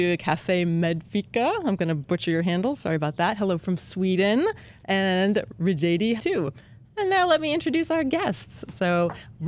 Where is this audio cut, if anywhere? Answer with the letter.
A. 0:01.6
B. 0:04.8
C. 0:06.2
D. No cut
C